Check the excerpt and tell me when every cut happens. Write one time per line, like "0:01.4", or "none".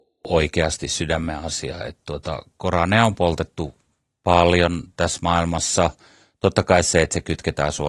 0:01.8